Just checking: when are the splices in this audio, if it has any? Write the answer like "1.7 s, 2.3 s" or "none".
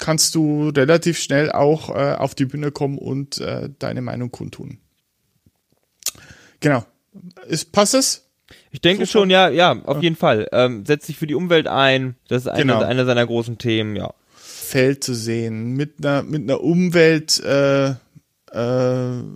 12.2 s, 14.6 s